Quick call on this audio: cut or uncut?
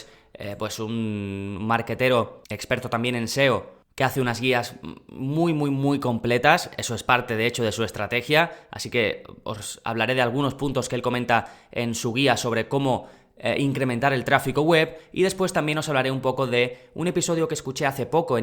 uncut